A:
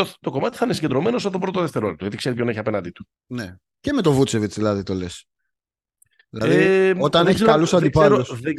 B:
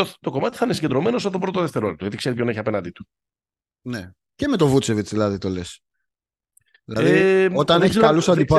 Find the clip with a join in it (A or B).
A